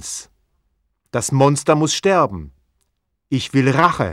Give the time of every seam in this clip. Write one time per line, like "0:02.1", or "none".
none